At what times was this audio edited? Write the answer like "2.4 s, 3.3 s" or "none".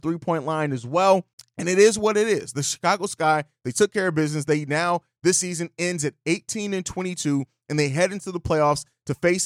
none

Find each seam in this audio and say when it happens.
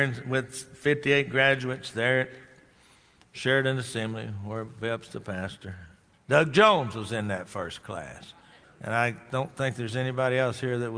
6.1 s, 8.6 s

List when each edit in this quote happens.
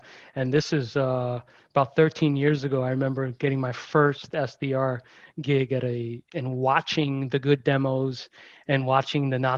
6.3 s

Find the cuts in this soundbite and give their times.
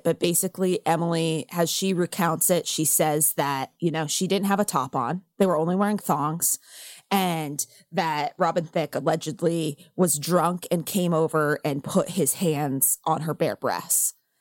none

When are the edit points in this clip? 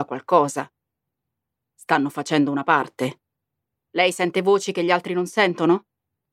3.7 s

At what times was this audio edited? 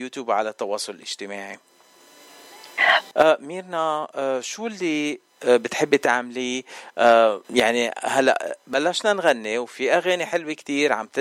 3.1 s, 7.4 s

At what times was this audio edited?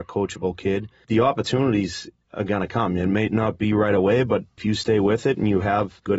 none

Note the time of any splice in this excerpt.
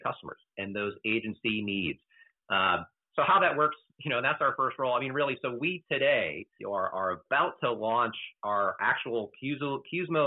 6.6 s

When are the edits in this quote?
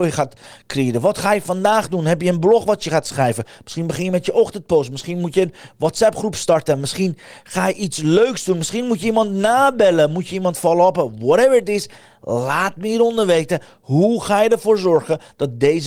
none

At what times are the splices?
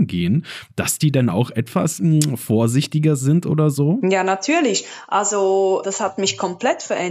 5.8 s

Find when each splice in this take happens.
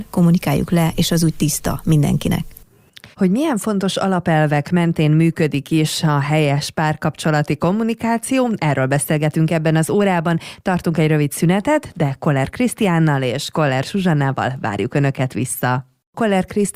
3.1 s

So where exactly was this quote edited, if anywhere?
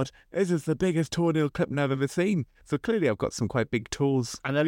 none

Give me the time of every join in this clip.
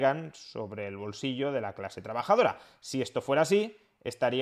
none

